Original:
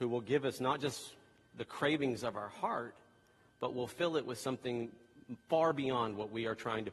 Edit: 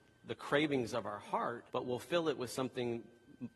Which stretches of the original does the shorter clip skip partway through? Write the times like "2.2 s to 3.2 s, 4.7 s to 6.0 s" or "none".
3.0 s to 3.6 s